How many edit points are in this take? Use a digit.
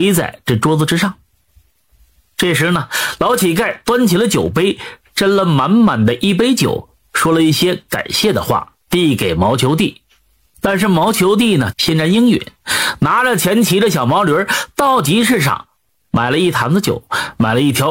3